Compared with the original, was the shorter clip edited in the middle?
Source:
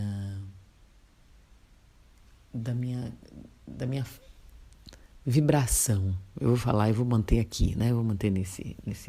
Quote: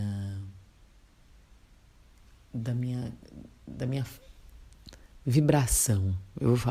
no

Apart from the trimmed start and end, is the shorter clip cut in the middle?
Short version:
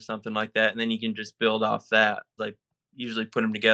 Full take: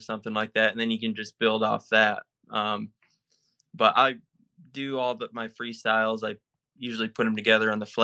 yes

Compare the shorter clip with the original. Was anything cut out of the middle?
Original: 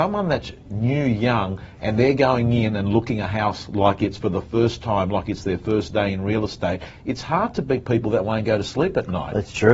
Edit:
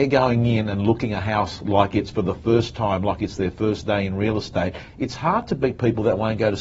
no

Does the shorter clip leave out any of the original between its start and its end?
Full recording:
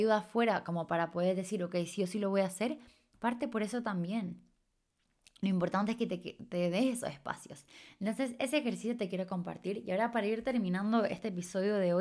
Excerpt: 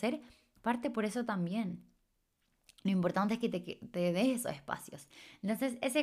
no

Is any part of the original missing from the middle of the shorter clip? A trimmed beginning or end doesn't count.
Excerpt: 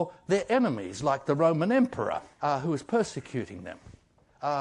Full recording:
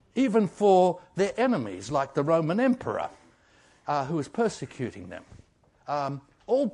yes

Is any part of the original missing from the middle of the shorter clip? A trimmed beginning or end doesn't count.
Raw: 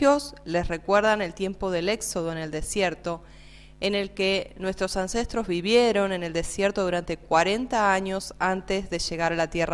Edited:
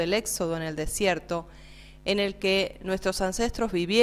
no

